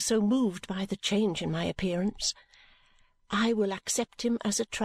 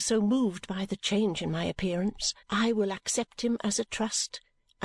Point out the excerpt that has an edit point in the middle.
second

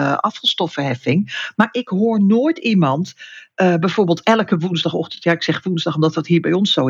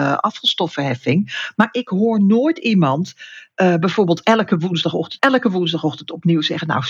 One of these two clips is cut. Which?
second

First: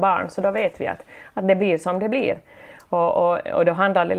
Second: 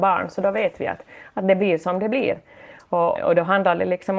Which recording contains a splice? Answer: second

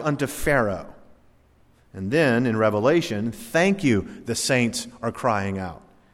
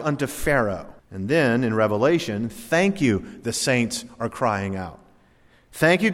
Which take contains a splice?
second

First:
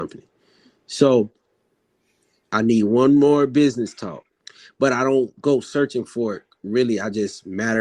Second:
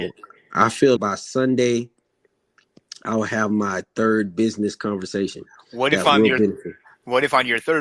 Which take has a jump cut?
second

